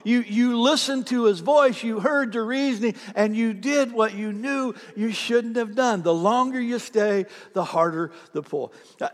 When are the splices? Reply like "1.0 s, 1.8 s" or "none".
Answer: none